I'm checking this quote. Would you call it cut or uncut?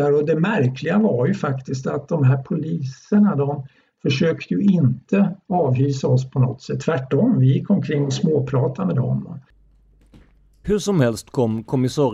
cut